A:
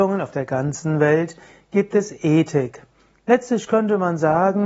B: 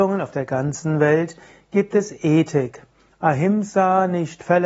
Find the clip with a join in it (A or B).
B